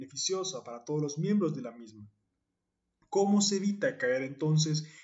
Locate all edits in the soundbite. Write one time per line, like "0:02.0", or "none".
none